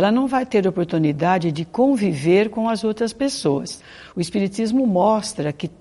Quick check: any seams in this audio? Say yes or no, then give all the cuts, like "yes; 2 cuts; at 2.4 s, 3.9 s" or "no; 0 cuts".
no; 0 cuts